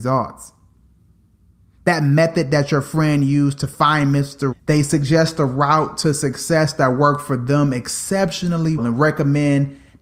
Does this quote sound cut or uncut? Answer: cut